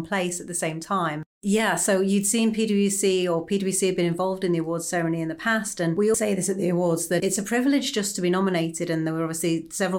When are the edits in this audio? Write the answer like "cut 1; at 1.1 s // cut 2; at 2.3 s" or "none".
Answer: cut 1; at 6.1 s